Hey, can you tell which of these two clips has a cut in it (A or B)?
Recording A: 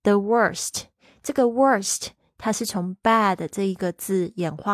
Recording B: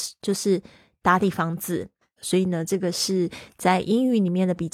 B